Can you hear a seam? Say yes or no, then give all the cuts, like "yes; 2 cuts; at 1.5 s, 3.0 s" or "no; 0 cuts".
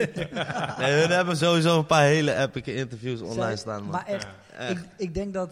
no; 0 cuts